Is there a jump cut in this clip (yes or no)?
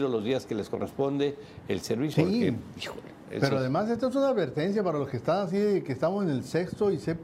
yes